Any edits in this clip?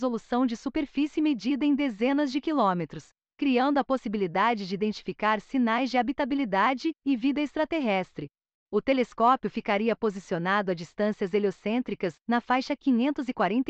no; 0 cuts

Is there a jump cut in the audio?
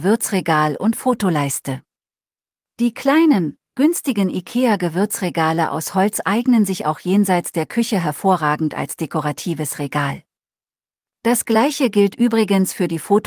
yes; 1 cut; at 11.1 s

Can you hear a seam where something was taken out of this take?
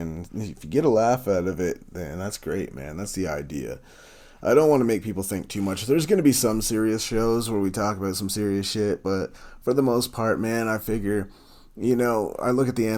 no; 0 cuts

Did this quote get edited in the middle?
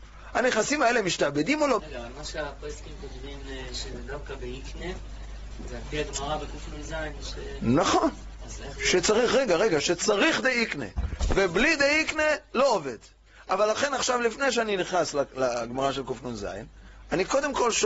yes; 1 cut; at 1.8 s

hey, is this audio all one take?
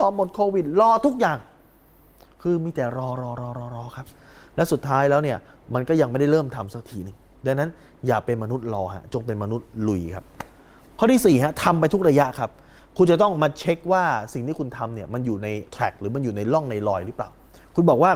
no; 1 cut; at 15.7 s

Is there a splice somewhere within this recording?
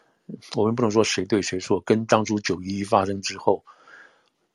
no; 0 cuts

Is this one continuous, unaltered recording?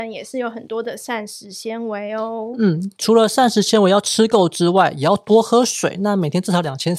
yes; 0 cuts

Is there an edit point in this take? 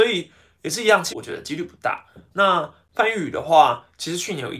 yes; 1 cut; at 1.1 s

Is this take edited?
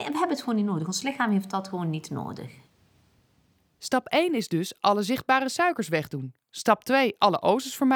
no; 0 cuts

